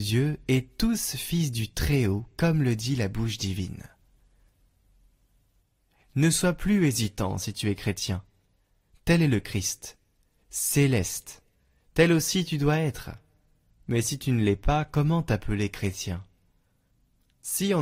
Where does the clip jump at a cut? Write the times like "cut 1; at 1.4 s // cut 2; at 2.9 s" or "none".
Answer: none